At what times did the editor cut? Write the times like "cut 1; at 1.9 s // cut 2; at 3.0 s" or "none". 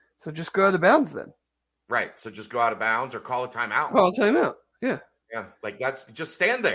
cut 1; at 5.5 s